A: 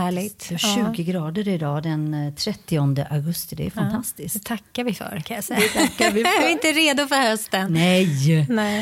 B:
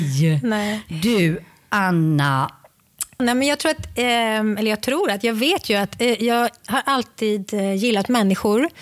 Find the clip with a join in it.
B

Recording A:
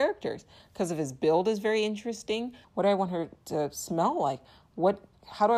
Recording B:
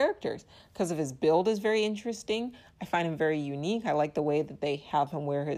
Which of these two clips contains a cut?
A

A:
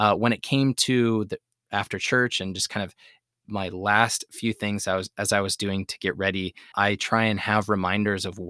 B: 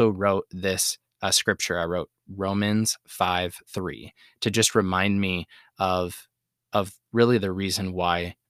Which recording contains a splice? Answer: A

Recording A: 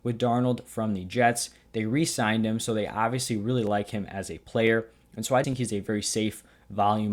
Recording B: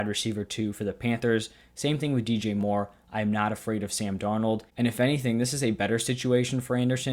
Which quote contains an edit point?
A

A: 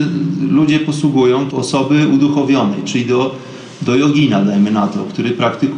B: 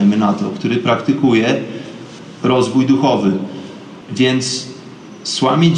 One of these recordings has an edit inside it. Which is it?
A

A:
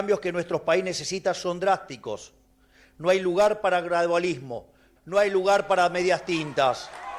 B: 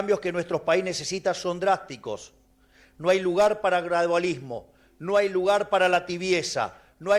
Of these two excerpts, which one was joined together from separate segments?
A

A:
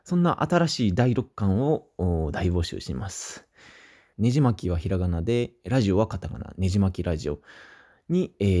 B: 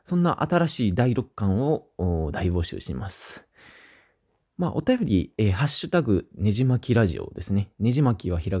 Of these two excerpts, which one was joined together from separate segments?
A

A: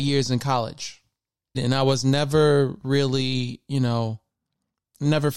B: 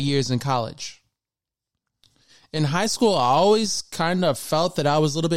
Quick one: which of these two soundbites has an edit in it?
A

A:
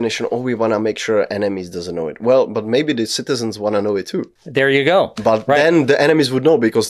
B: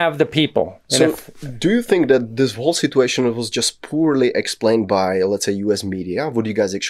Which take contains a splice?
A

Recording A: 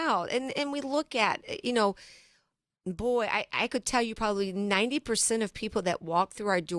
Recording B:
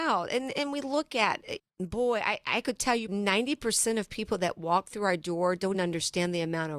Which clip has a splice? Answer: B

